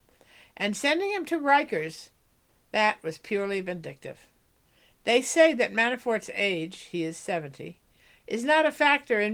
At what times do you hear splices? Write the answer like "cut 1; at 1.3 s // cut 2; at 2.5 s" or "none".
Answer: none